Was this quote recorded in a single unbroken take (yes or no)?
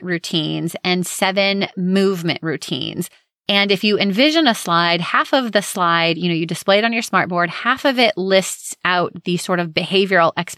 yes